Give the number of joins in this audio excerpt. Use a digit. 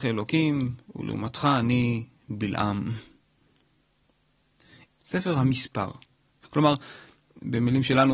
2